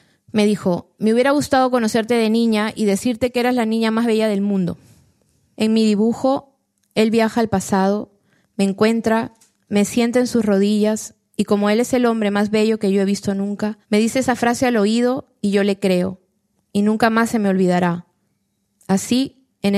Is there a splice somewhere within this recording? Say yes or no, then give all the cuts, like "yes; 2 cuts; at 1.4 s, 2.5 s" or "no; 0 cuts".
yes; 1 cut; at 13.8 s